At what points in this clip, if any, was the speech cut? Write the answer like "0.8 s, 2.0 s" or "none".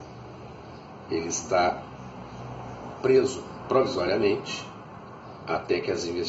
1.1 s